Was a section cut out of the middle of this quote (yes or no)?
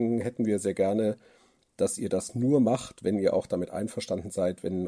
no